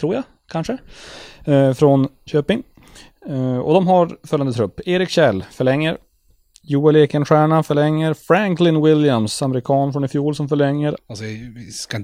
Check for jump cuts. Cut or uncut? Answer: cut